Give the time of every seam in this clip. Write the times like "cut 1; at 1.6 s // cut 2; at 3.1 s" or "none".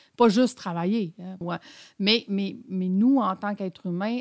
cut 1; at 1.4 s